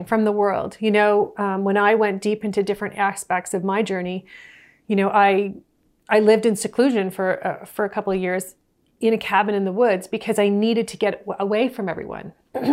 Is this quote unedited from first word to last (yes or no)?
yes